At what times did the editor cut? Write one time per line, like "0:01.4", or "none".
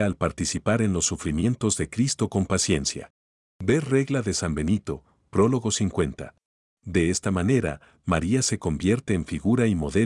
0:06.8